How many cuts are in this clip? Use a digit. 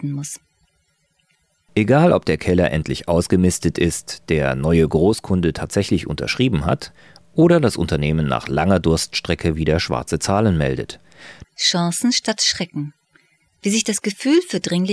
1